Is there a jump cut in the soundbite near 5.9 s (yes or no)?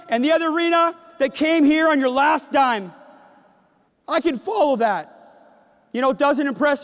no